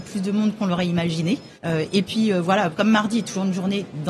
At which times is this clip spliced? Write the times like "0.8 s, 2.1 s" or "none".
1.5 s, 2.7 s